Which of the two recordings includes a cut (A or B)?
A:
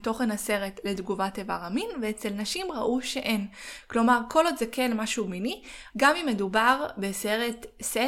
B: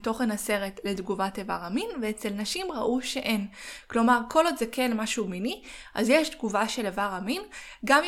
A